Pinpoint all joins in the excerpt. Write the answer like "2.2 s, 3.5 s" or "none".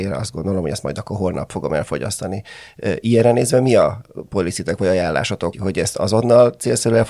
5.5 s